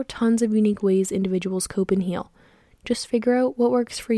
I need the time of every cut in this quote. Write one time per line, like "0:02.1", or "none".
none